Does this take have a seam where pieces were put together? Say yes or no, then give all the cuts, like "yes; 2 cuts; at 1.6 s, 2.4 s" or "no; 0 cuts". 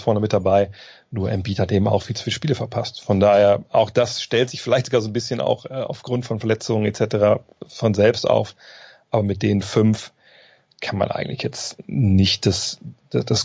no; 0 cuts